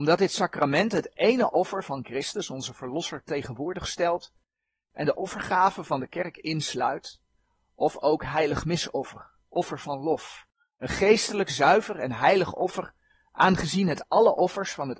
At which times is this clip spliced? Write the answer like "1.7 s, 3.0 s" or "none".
none